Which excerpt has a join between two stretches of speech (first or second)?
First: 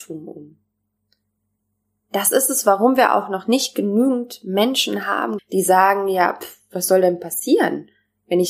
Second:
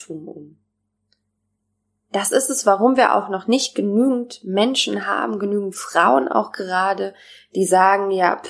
first